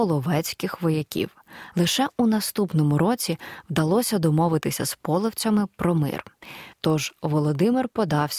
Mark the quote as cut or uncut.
cut